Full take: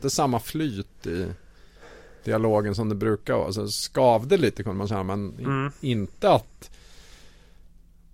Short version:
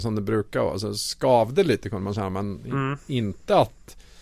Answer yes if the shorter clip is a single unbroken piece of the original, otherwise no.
yes